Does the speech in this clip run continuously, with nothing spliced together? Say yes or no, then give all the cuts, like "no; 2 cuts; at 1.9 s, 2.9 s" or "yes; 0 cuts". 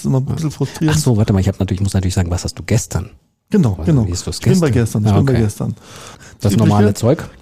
no; 2 cuts; at 3.8 s, 6.1 s